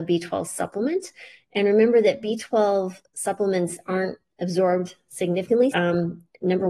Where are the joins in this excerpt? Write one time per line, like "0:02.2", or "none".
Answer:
0:05.7